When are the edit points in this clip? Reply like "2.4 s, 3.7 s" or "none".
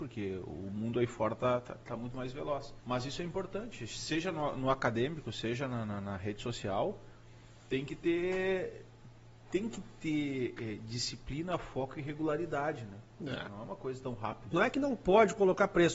2.8 s, 13.5 s, 14.5 s